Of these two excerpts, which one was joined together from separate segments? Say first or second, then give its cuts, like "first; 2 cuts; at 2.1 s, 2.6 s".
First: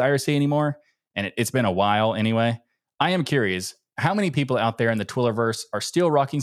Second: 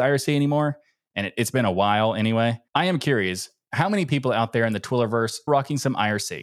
second; 2 cuts; at 2.7 s, 5.5 s